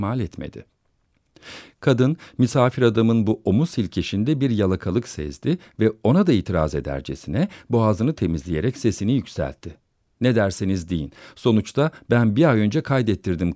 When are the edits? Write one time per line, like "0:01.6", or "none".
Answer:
none